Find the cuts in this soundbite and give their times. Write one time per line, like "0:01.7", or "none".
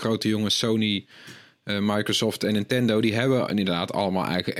none